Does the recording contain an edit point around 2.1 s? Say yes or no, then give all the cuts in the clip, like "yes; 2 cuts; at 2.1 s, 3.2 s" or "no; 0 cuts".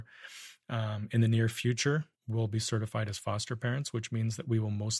yes; 1 cut; at 2.1 s